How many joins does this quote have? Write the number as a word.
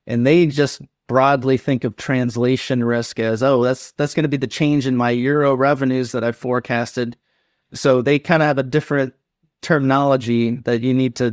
one